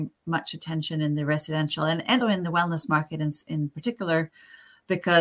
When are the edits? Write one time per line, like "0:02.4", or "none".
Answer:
0:02.2